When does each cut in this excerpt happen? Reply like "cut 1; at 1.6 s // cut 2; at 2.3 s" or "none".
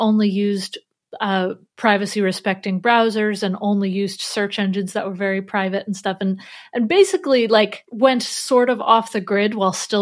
cut 1; at 7.9 s